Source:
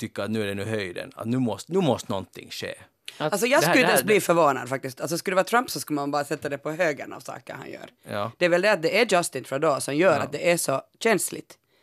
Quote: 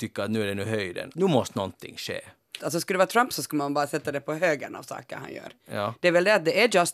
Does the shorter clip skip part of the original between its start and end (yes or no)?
yes